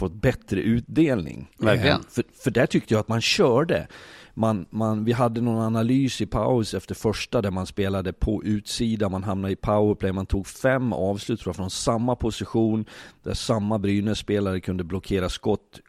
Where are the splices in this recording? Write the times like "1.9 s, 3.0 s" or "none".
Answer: 1.5 s

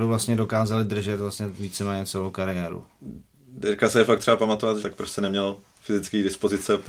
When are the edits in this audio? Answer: 4.8 s

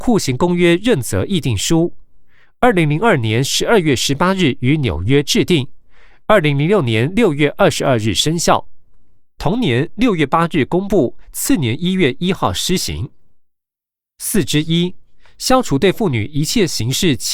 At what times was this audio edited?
9.4 s

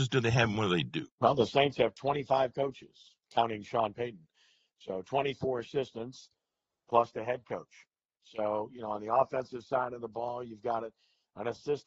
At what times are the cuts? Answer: 1.1 s

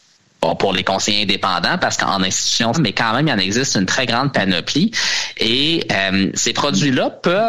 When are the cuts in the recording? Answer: 2.7 s

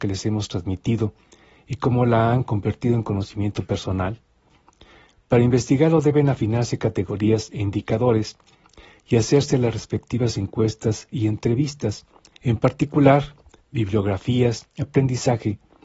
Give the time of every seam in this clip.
12.3 s, 13.6 s, 14.6 s

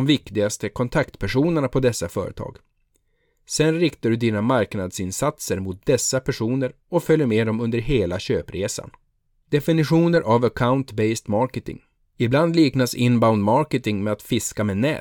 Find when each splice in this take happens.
9.4 s, 12.0 s

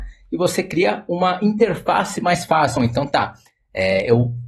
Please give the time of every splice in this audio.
2.8 s

